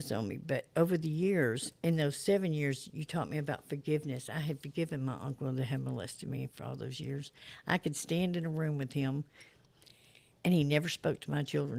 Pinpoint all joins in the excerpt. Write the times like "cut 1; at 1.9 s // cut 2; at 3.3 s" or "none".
none